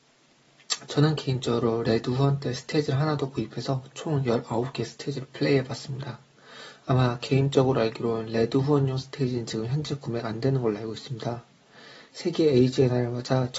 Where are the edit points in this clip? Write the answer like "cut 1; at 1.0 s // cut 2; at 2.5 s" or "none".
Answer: none